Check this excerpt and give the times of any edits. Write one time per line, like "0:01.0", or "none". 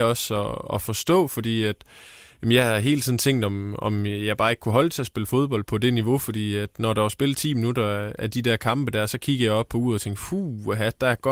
0:05.6